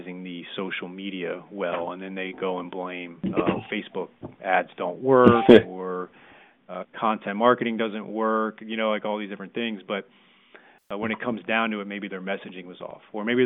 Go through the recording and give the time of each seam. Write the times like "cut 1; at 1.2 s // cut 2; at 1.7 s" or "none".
none